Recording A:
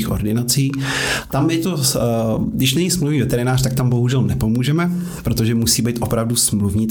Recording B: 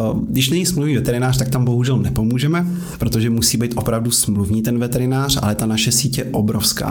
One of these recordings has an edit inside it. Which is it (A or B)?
A